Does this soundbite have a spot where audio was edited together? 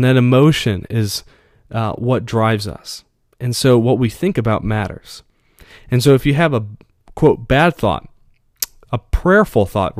no; 0 cuts

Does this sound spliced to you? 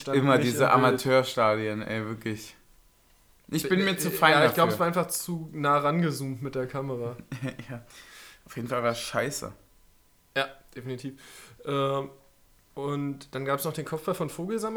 no; 0 cuts

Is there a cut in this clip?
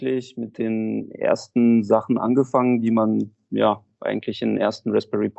no; 0 cuts

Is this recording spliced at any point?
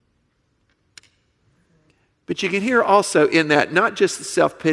no; 0 cuts

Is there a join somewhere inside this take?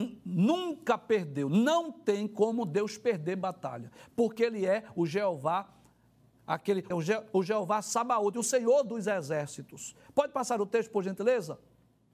yes; 1 cut; at 6.9 s

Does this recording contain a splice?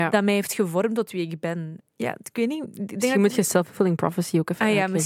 yes; 1 cut; at 1.8 s

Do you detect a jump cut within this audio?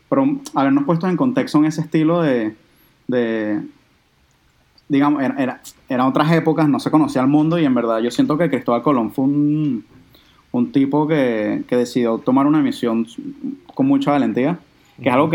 no; 0 cuts

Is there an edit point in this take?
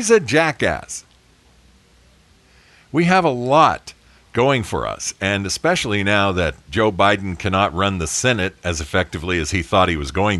no; 0 cuts

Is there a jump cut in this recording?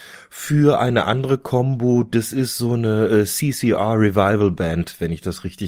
no; 0 cuts

